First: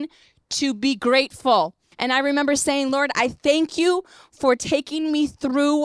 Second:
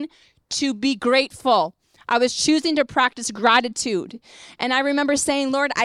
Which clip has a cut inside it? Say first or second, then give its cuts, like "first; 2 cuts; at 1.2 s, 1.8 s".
first; 1 cut; at 1.9 s